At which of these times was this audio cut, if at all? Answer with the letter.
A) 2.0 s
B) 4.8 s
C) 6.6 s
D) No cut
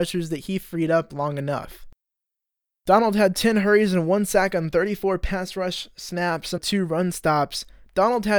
C